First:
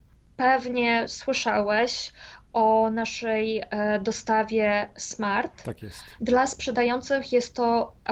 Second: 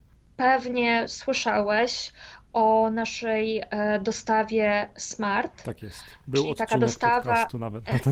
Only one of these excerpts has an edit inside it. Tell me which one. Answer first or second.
first